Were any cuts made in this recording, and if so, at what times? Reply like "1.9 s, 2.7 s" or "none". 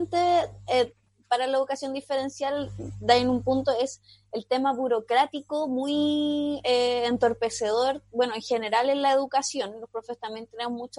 none